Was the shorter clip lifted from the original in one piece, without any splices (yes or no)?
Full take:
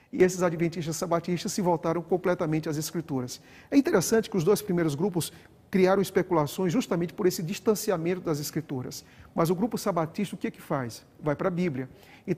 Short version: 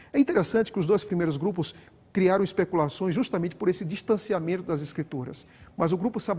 yes